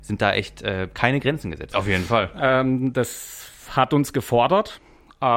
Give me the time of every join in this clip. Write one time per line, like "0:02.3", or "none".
0:01.7